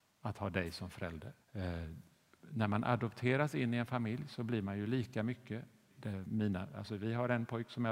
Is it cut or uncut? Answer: cut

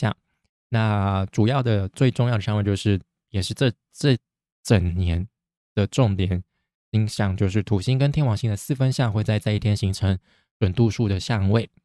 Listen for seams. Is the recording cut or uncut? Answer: uncut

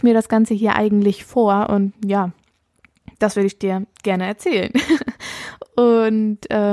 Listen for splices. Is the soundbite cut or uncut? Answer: uncut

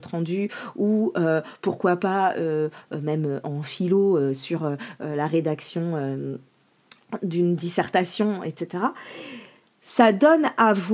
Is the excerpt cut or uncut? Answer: uncut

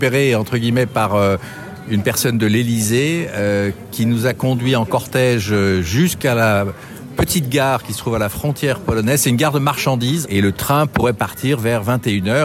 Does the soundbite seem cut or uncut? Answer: cut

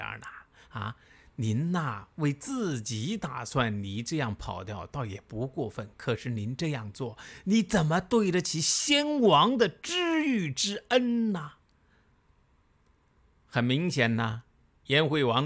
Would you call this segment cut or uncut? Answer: uncut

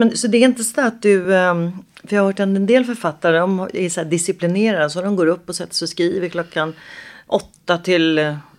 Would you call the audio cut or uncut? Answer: uncut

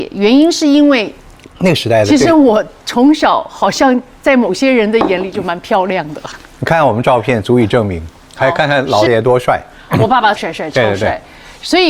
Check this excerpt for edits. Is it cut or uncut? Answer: cut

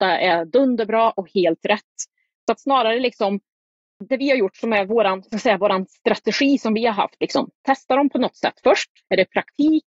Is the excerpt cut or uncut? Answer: uncut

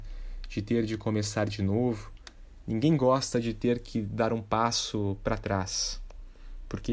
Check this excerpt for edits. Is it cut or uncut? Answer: uncut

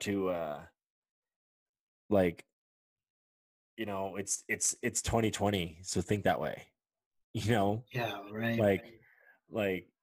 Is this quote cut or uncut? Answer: uncut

